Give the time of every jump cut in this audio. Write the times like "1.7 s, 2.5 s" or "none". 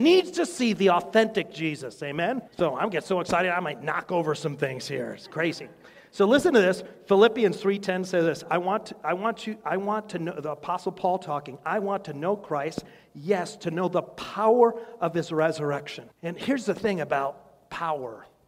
2.5 s, 16.1 s